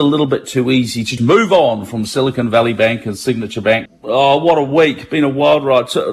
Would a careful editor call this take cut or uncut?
cut